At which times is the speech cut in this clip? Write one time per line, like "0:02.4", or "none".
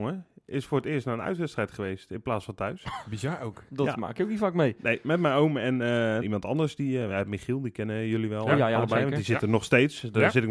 0:06.2